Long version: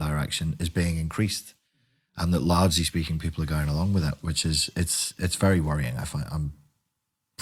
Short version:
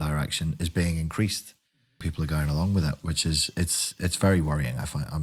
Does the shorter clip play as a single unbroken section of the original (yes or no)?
no